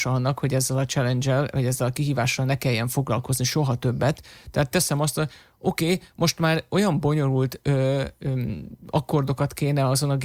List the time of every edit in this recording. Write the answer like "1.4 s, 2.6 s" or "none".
none

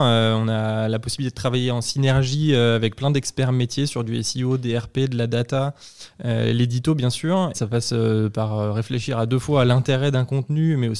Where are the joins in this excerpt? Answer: 7.5 s

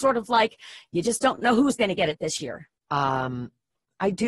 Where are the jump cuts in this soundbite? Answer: 2.8 s

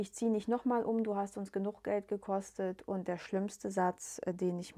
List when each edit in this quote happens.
none

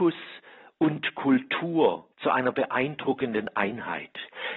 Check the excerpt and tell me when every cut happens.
2.1 s

